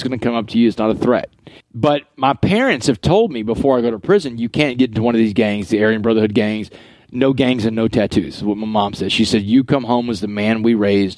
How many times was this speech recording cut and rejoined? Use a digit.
1